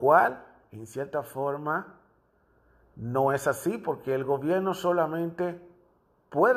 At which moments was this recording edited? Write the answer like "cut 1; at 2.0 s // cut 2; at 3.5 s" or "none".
none